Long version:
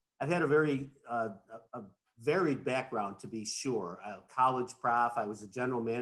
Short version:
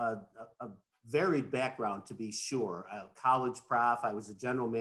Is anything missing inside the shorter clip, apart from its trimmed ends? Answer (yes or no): no